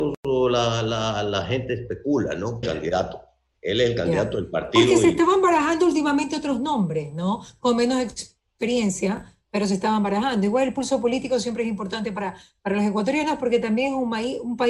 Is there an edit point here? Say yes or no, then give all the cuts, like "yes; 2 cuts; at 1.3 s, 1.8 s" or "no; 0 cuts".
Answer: yes; 1 cut; at 2.6 s